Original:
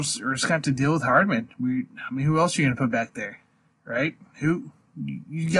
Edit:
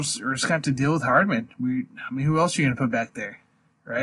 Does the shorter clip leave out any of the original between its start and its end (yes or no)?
no